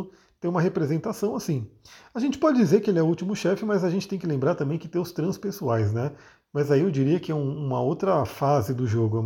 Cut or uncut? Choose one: uncut